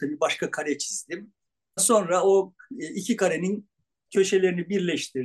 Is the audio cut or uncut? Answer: cut